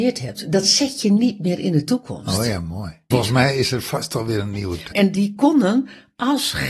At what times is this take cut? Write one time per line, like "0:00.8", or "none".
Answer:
0:03.1
0:04.9